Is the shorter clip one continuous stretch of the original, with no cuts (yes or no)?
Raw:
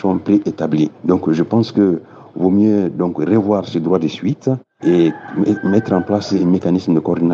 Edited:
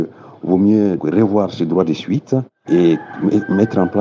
no